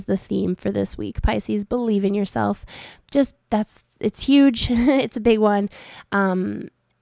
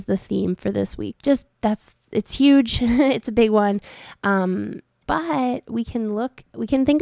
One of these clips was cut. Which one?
second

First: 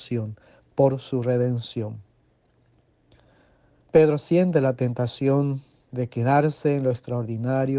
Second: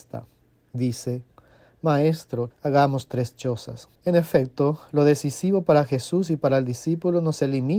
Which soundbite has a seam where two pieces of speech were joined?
second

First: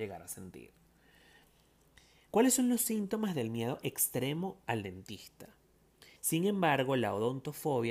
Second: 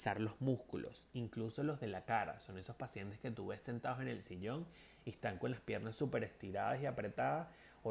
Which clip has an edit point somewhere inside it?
first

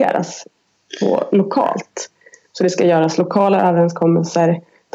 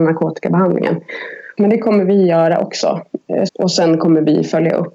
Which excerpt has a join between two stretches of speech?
second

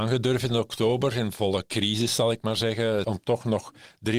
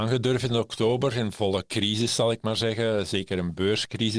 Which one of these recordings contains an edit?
first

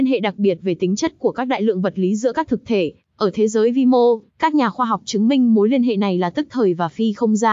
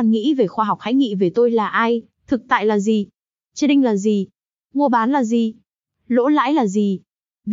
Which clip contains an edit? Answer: first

